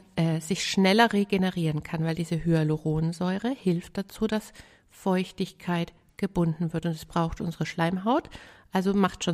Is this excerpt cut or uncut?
uncut